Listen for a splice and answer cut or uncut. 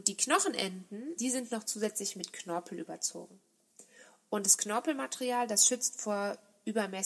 cut